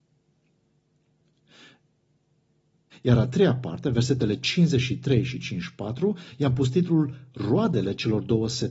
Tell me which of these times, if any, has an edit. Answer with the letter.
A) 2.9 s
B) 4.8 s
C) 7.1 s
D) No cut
A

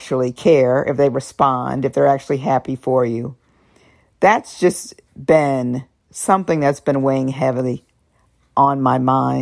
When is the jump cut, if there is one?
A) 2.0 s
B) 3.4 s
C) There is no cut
C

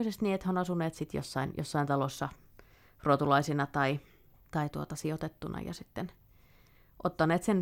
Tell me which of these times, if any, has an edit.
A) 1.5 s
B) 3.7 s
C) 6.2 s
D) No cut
D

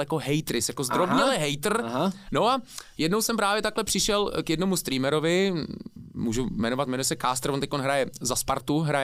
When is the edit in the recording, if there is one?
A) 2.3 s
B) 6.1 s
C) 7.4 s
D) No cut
A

